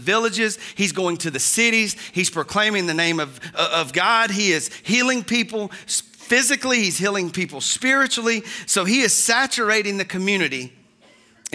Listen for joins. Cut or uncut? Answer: uncut